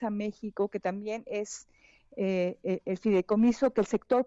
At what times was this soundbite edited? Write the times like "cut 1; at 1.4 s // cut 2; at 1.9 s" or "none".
none